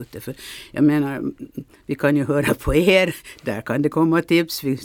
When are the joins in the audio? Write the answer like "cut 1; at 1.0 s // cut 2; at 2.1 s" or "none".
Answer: none